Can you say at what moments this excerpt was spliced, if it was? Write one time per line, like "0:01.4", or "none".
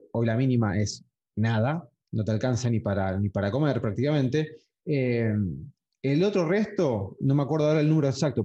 0:04.8
0:07.2